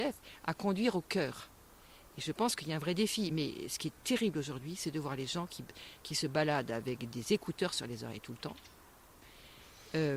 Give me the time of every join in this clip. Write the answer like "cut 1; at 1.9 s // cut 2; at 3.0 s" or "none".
none